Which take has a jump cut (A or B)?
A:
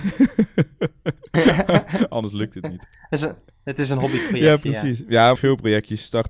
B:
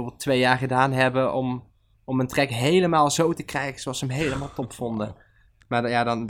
A